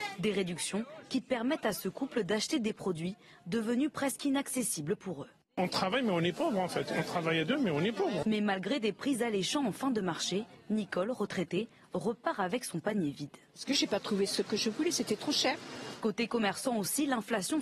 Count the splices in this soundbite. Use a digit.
1